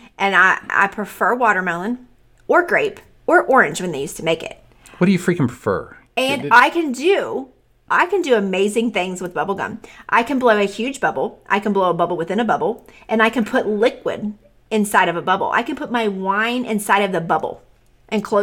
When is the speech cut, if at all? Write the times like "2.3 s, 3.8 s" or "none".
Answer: none